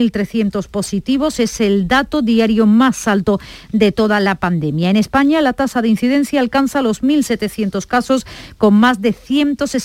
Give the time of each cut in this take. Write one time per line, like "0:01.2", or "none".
none

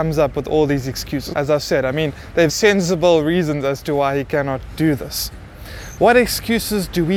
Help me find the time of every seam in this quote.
0:01.3
0:02.5
0:06.0

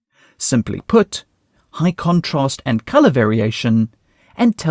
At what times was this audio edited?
0:01.6

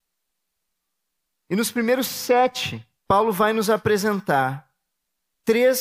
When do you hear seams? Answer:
0:01.3
0:03.0

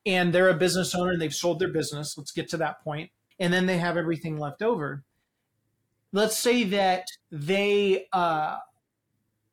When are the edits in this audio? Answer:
0:03.3
0:07.2

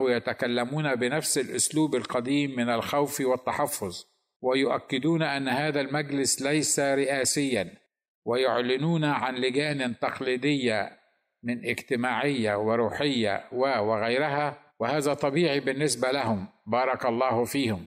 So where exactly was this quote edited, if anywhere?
0:13.5
0:14.7

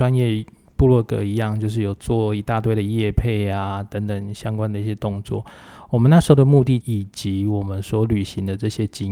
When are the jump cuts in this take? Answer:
0:06.8

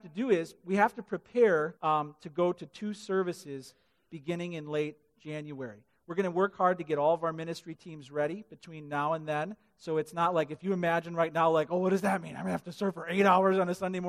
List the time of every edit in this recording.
0:01.8

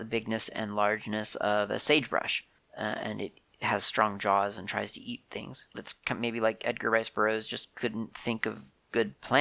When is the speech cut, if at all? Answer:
0:05.7

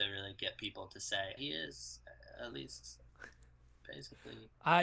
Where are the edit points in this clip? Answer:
0:01.4

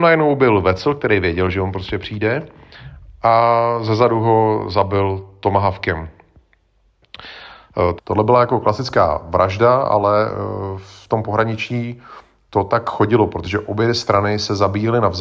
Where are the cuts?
0:08.0

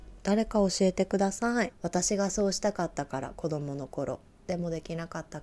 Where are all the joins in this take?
0:01.7

